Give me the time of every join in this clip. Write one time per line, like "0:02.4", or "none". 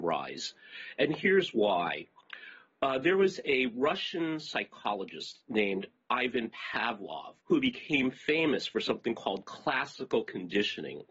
0:07.4